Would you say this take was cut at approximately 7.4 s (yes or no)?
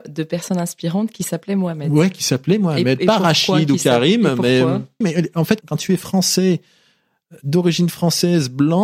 no